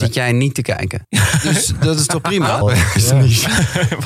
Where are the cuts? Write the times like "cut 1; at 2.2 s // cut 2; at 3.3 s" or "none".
cut 1; at 1.0 s // cut 2; at 2.6 s